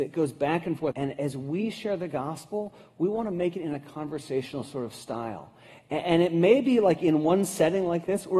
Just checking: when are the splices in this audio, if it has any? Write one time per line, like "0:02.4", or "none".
0:00.9